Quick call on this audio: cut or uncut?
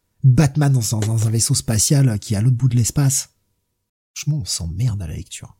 cut